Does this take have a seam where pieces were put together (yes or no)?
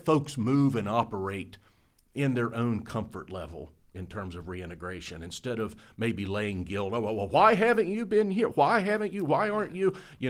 no